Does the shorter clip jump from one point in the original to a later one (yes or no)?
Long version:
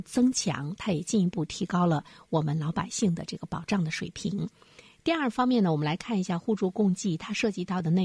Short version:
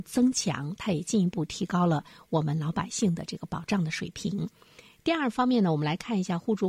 no